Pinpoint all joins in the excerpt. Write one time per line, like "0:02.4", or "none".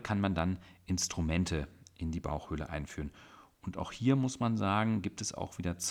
none